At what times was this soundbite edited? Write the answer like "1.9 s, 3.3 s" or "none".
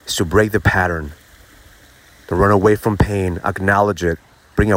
none